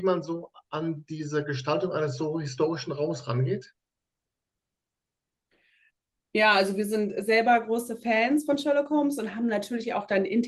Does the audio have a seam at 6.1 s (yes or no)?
no